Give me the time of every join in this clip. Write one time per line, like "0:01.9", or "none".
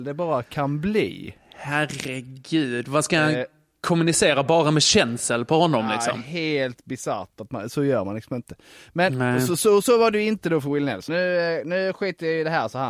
none